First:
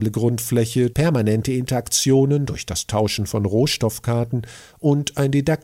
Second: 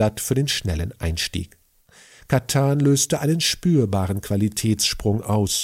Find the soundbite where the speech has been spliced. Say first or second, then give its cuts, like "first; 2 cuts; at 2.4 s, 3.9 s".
first; 1 cut; at 0.9 s